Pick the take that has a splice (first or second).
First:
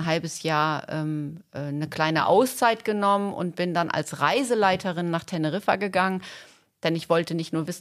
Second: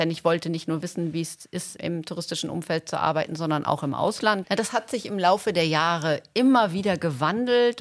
second